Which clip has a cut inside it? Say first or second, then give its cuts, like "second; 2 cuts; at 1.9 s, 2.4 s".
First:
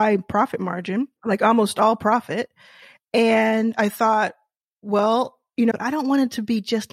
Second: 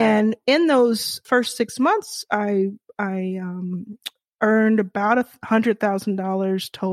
first; 2 cuts; at 1.2 s, 5.7 s